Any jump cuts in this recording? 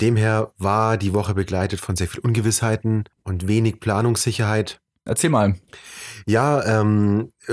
yes; 2 cuts; at 3.1 s, 5.1 s

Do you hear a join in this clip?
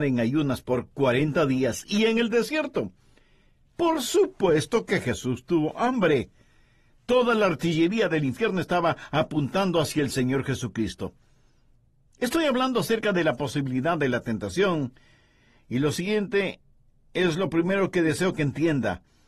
no; 0 cuts

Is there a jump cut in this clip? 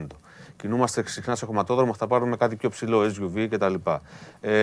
no; 0 cuts

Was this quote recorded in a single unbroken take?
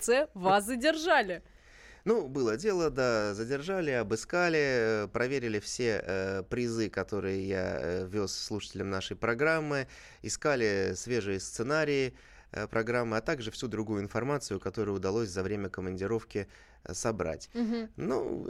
yes; 0 cuts

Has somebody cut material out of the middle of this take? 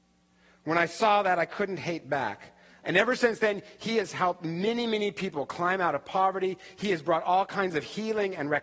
yes; 1 cut; at 2.8 s

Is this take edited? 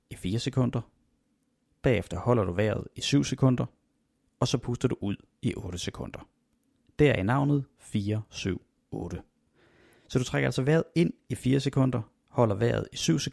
no; 0 cuts

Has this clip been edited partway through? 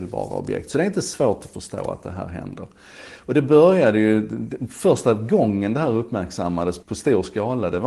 yes; 1 cut; at 6.8 s

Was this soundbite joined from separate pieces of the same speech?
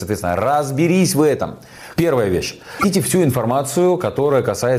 yes; 1 cut; at 2.0 s

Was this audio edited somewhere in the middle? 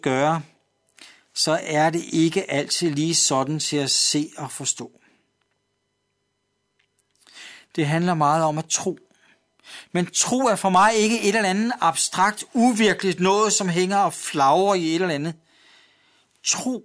no; 0 cuts

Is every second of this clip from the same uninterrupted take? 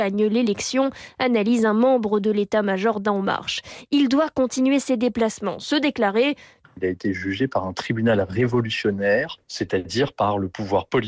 no; 2 cuts; at 6.6 s, 9.4 s

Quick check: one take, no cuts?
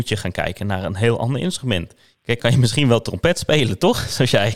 no; 1 cut; at 2.4 s

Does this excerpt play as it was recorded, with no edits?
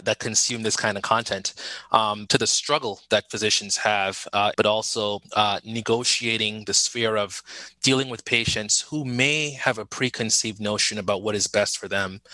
no; 2 cuts; at 2.3 s, 4.5 s

